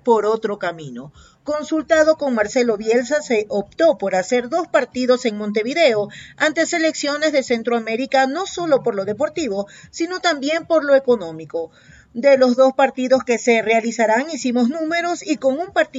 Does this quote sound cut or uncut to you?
uncut